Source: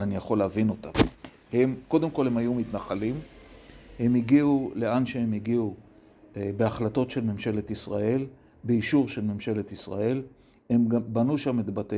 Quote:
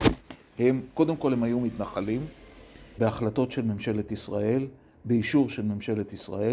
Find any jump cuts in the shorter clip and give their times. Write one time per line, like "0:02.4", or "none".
0:03.0